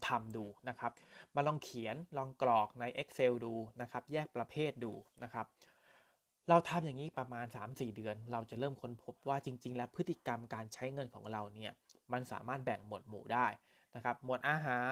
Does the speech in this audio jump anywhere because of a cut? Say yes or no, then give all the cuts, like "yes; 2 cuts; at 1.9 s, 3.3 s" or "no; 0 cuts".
yes; 1 cut; at 7.1 s